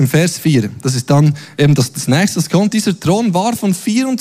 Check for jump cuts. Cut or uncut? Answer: uncut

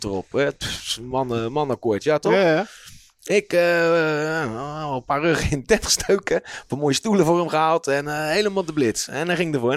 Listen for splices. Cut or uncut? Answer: uncut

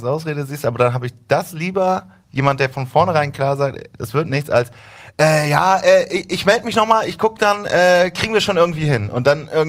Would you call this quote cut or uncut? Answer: uncut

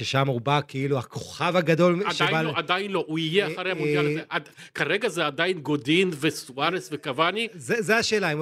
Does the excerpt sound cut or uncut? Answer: uncut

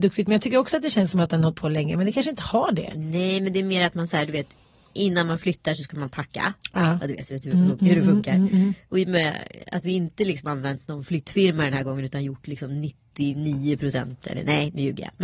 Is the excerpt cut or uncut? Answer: uncut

